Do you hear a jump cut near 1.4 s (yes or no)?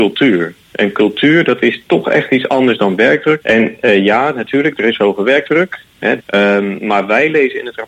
no